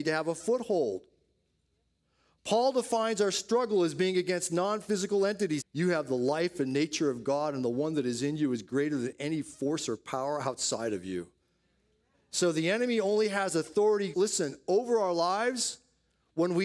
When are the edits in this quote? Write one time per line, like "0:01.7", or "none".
0:05.6
0:12.1
0:14.1